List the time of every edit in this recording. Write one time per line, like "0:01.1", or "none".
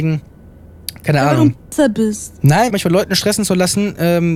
0:02.7